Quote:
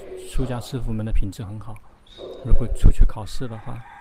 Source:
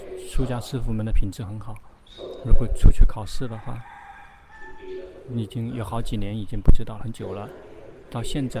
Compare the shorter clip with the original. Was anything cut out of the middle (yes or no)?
no